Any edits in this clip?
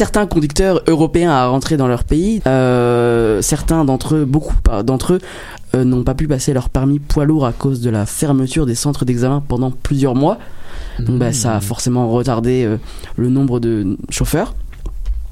yes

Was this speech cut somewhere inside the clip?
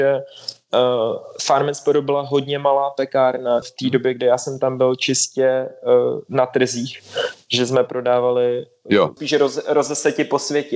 yes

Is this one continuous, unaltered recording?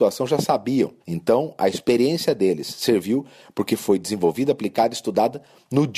no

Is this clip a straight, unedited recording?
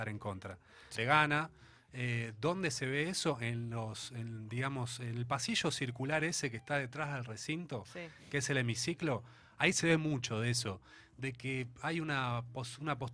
no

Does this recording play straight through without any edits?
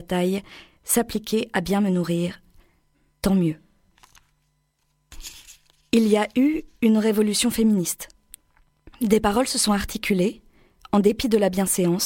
yes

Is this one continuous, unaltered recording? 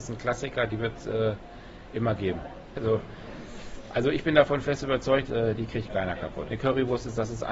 no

